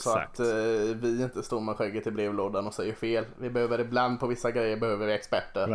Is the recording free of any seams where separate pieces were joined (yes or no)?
yes